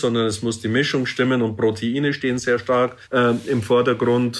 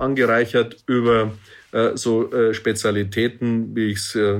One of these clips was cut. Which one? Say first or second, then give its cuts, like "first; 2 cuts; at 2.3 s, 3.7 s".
first; 1 cut; at 3.0 s